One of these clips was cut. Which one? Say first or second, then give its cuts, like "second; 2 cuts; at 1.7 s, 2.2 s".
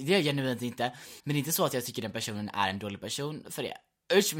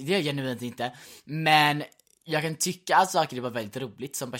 first; 1 cut; at 1.2 s